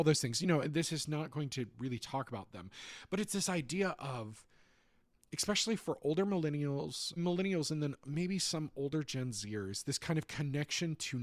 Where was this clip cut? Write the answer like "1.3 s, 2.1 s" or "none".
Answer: 7.2 s